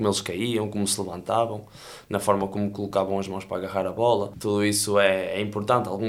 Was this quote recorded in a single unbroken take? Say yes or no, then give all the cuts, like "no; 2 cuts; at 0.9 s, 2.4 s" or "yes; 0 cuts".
yes; 0 cuts